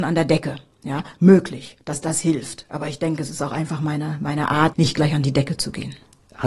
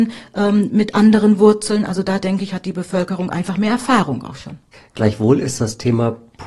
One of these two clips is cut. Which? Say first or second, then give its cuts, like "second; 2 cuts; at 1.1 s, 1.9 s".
first; 1 cut; at 4.7 s